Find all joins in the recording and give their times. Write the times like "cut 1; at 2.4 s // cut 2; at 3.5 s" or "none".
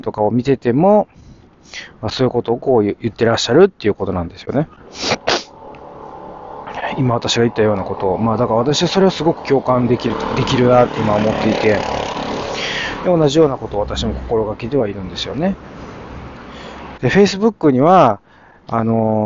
cut 1; at 17.0 s